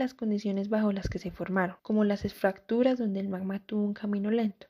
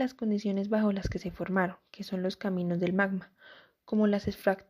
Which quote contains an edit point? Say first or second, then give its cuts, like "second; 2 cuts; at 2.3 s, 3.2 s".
first; 1 cut; at 1.8 s